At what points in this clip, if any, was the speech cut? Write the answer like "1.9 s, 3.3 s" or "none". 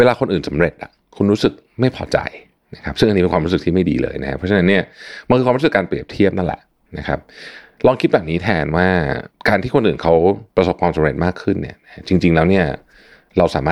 10.5 s